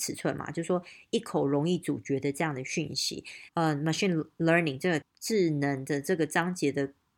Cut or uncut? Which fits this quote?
cut